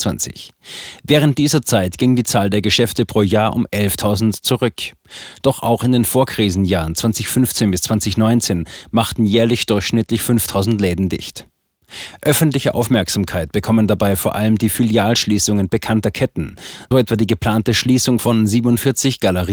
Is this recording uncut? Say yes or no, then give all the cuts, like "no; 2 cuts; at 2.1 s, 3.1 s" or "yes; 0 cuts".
no; 1 cut; at 16.9 s